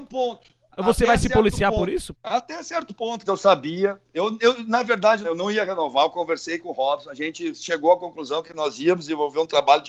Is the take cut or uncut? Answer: cut